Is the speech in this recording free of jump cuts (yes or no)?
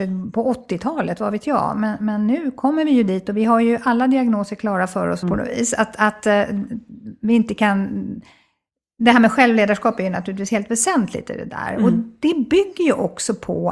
no